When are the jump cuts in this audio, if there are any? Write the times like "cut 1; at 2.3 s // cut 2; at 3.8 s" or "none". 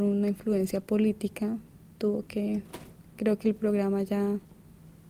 none